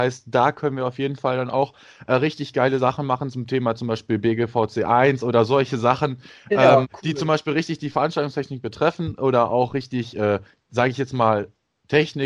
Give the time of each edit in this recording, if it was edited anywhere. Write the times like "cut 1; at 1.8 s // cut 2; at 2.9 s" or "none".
cut 1; at 6.8 s